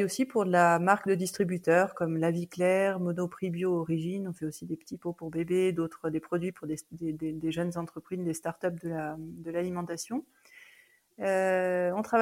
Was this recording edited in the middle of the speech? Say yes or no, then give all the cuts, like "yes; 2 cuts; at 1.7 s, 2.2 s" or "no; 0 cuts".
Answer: no; 0 cuts